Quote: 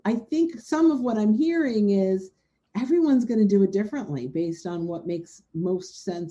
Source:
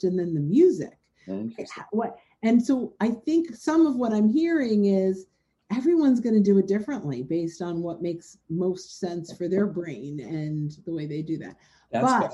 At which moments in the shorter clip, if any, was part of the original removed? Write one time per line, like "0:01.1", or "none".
none